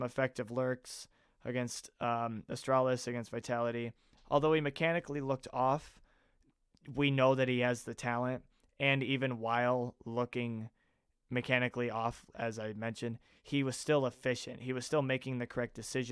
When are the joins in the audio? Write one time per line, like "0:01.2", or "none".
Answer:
none